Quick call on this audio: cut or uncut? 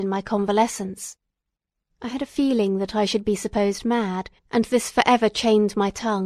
cut